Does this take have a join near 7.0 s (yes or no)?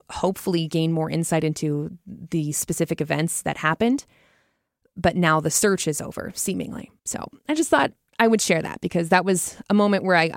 yes